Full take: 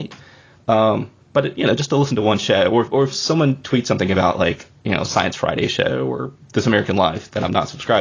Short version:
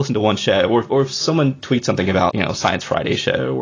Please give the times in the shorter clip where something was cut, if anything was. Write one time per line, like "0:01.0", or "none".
0:02.3

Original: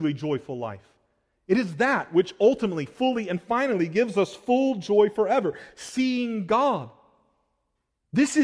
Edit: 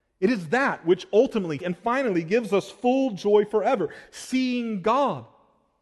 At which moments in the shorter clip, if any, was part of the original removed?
0:01.6

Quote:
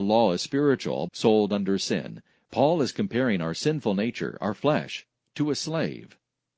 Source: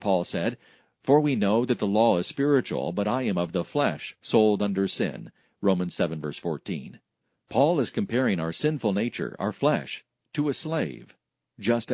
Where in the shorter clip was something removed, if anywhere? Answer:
0:01.1
0:02.4

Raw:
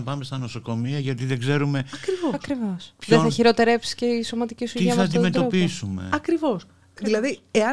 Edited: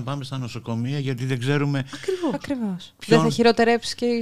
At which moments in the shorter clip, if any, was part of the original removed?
none

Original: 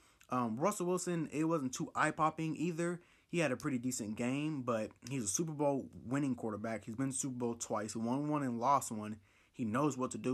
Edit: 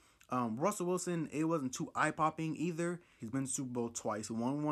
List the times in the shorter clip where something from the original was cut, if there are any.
0:03.2

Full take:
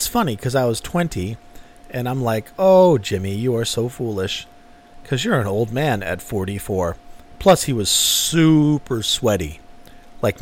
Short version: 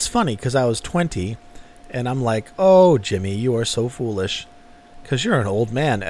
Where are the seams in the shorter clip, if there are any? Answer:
none

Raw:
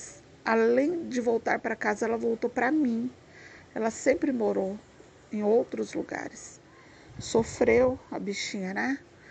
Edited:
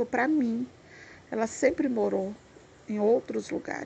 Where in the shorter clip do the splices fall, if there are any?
none

